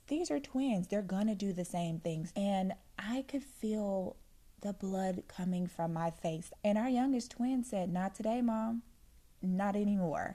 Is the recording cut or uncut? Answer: cut